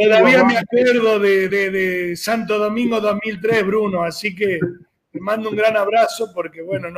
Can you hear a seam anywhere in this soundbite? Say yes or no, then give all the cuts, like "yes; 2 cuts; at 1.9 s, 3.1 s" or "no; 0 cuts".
no; 0 cuts